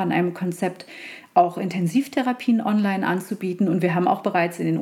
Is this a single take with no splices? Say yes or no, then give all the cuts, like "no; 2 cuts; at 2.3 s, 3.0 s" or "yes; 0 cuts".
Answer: yes; 0 cuts